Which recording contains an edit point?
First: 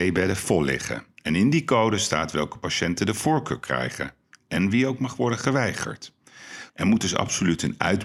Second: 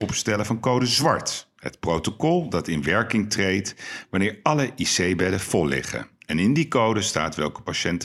first; 1 cut; at 6.7 s

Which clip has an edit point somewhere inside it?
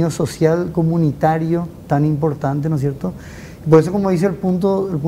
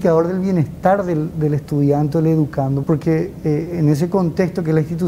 second; 1 cut; at 2.8 s

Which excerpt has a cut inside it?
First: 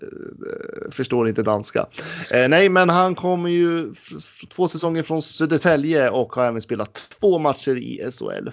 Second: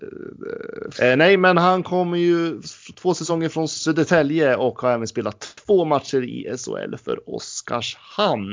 second; 2 cuts; at 0.9 s, 2.6 s

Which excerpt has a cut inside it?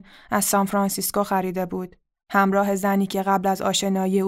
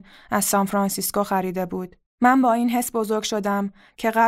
second; 1 cut; at 2.1 s

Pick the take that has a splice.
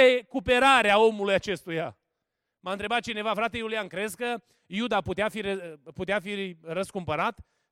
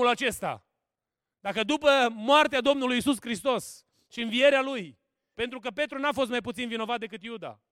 second; 1 cut; at 5.3 s

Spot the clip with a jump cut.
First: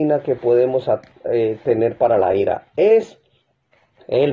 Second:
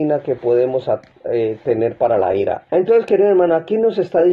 second; 1 cut; at 2.7 s

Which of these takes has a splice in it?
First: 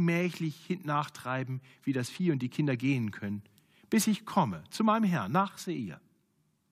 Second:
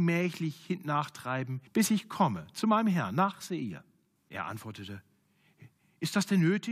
second; 2 cuts; at 1.7 s, 4.2 s

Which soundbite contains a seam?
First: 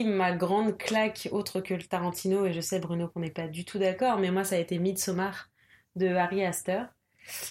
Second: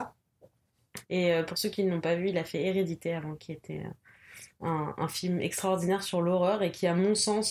second; 1 cut; at 1.0 s

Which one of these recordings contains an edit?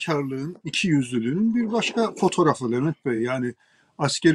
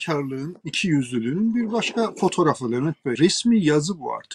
second; 1 cut; at 3.2 s

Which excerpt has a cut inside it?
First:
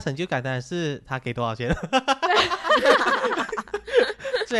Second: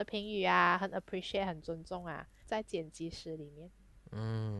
second; 1 cut; at 2.4 s

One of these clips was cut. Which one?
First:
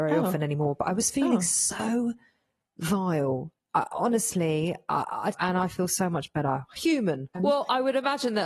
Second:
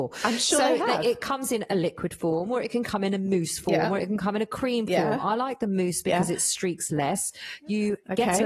first; 2 cuts; at 5.3 s, 7.3 s

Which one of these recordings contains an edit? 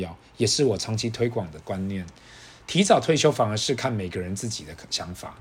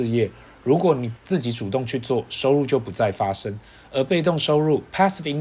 second; 1 cut; at 1.2 s

